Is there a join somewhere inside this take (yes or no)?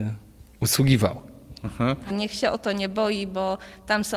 yes